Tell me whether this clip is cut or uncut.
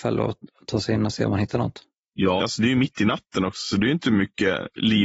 cut